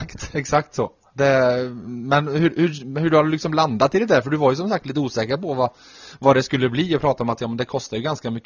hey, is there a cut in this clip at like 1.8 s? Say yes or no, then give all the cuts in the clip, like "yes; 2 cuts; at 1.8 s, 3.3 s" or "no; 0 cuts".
no; 0 cuts